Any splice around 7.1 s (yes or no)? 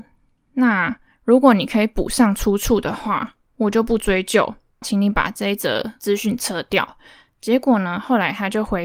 no